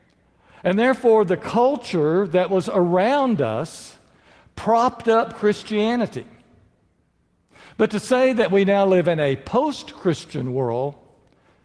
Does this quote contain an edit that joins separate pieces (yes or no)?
no